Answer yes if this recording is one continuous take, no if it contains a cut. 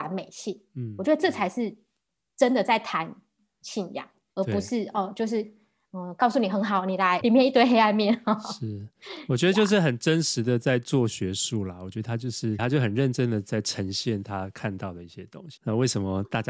no